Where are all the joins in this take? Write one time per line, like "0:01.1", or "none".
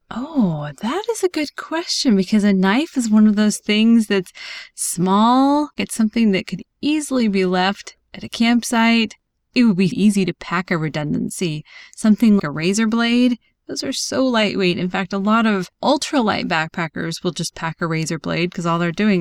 0:09.9
0:12.4